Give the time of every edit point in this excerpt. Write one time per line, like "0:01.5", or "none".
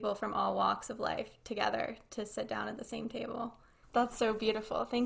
0:03.8